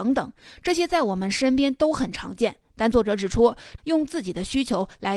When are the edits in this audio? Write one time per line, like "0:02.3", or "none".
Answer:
0:03.8